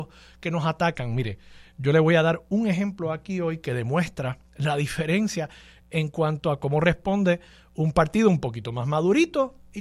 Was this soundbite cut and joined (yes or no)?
no